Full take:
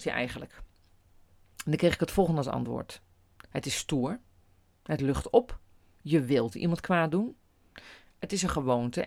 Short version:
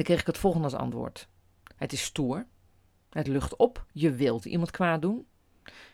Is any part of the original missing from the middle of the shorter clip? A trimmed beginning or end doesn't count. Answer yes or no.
yes